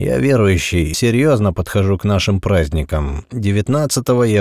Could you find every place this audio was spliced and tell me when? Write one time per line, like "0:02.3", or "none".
0:00.9